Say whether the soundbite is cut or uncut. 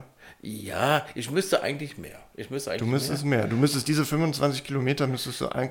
uncut